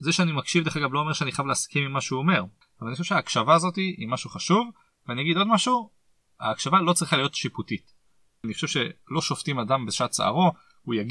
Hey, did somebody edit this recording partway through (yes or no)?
no